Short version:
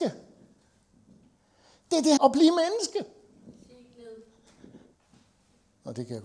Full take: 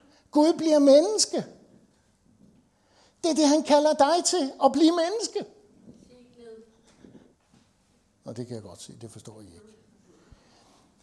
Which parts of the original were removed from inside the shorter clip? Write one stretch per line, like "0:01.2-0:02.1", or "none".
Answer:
0:03.5-0:04.6